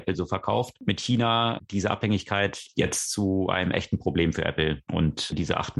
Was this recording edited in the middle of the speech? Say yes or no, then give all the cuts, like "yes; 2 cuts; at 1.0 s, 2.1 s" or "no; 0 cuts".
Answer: no; 0 cuts